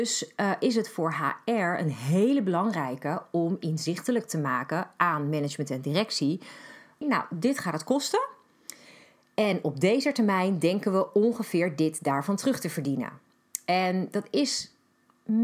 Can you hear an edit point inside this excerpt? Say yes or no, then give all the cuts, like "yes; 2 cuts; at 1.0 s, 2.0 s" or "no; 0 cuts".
yes; 1 cut; at 7.0 s